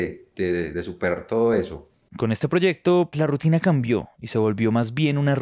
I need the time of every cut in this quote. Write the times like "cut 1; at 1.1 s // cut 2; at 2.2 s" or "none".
cut 1; at 2.1 s // cut 2; at 3.1 s